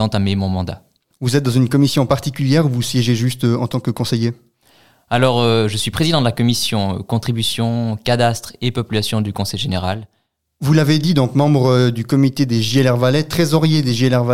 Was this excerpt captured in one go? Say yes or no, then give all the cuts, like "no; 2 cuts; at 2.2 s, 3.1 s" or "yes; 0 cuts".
yes; 0 cuts